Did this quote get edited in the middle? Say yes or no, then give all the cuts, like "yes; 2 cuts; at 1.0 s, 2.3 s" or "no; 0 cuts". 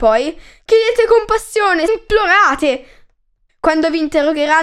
yes; 2 cuts; at 1.9 s, 3.5 s